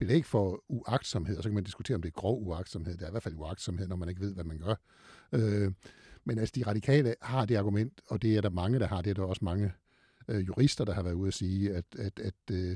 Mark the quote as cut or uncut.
uncut